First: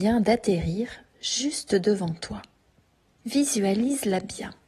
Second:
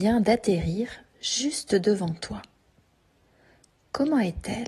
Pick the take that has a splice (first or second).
first